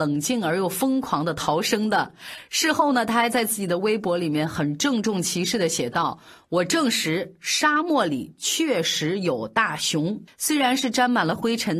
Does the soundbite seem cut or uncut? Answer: cut